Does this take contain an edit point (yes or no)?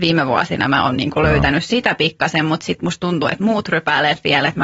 no